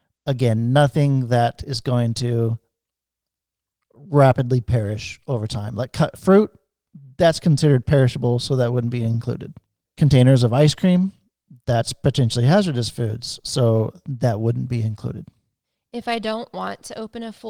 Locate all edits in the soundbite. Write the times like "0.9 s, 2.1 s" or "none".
none